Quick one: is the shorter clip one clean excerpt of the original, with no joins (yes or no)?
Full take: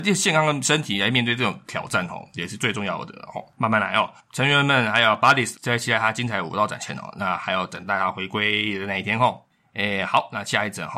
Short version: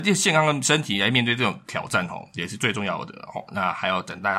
no